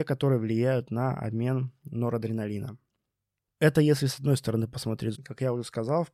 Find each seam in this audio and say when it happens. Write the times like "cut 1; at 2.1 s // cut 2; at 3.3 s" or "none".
cut 1; at 3.5 s // cut 2; at 5.2 s